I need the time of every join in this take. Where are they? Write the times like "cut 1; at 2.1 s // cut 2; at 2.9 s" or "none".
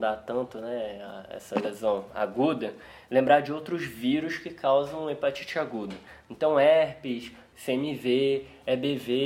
cut 1; at 7.5 s